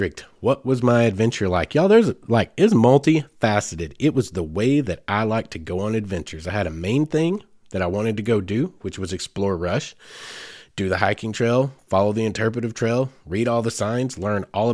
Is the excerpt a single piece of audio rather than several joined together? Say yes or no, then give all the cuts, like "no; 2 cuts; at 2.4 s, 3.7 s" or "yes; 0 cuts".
yes; 0 cuts